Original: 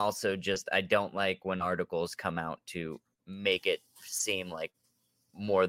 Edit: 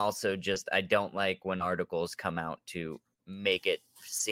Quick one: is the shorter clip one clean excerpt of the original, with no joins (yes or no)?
yes